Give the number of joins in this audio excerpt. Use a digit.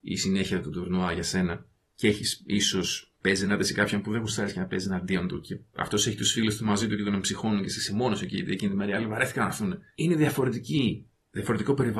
1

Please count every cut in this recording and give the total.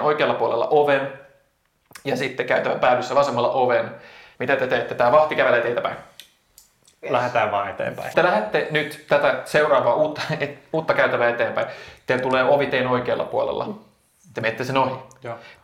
1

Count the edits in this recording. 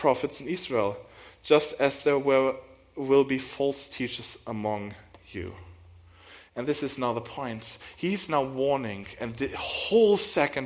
0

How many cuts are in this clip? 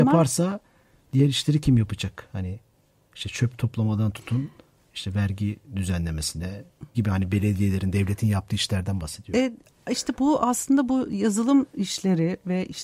1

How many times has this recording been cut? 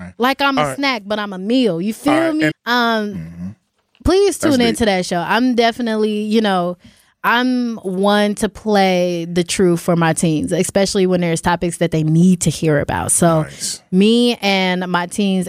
1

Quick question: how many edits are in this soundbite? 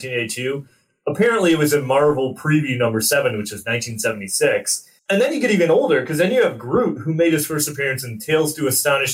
1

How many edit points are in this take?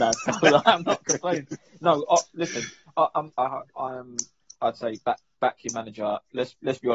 1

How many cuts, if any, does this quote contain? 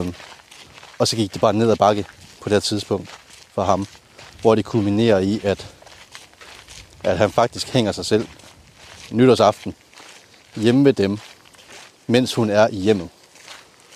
0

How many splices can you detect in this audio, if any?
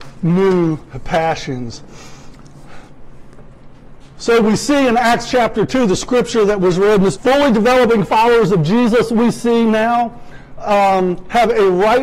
1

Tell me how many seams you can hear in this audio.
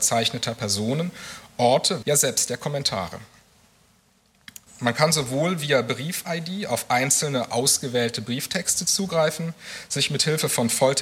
2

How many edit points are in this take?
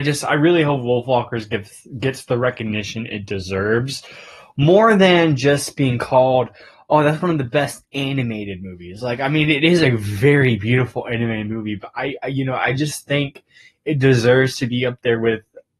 0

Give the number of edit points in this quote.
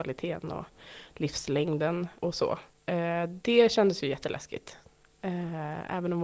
1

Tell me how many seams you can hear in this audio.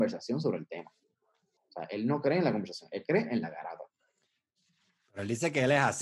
1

